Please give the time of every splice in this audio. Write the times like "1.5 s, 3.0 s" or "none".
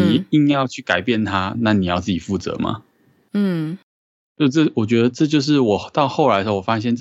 1.5 s